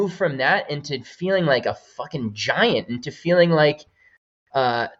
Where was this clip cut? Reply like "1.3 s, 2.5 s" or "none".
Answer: none